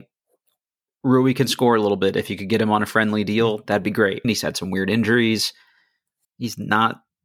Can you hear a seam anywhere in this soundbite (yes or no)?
yes